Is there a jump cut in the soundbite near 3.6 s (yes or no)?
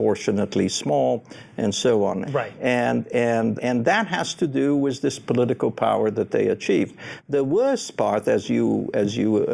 yes